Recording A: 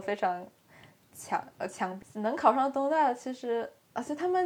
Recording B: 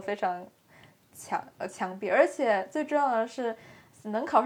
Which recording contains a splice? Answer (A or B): A